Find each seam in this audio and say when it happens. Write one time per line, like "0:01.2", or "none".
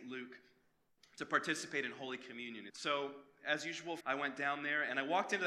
0:02.7
0:04.0